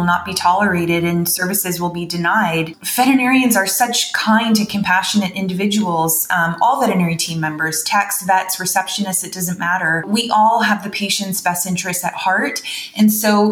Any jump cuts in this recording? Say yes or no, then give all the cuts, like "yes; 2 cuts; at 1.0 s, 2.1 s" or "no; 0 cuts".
no; 0 cuts